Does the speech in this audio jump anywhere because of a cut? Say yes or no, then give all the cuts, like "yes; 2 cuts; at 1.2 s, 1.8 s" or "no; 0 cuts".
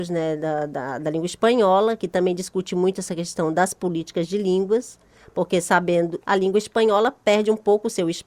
yes; 1 cut; at 6.2 s